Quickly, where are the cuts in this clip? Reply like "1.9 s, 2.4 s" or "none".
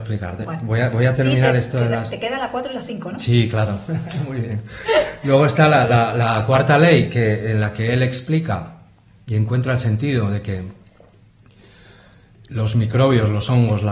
none